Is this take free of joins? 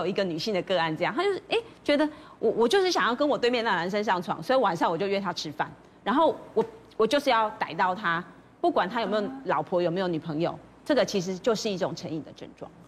yes; 0 cuts

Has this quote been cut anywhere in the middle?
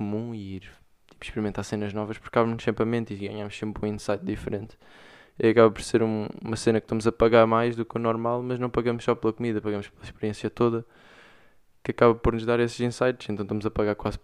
no; 0 cuts

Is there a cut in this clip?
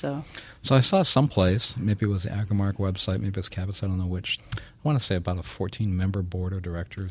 yes; 1 cut; at 4.4 s

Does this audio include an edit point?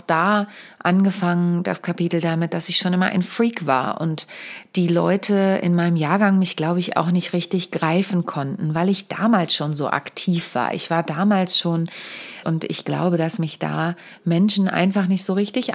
yes; 1 cut; at 12.4 s

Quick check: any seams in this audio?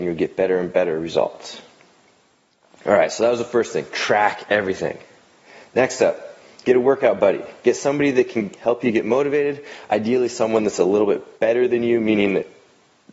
no; 0 cuts

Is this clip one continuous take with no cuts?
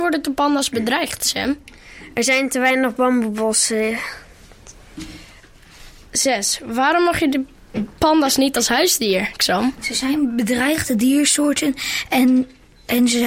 yes; 0 cuts

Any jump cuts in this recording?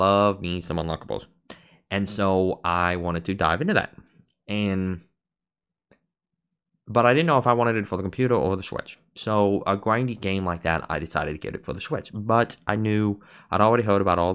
no; 0 cuts

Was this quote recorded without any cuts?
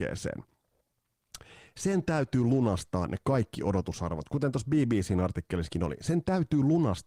yes; 0 cuts

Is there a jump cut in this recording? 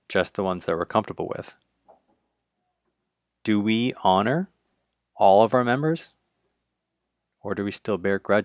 no; 0 cuts

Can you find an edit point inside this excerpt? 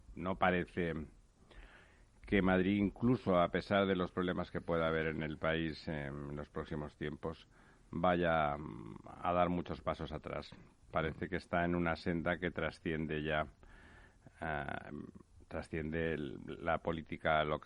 no; 0 cuts

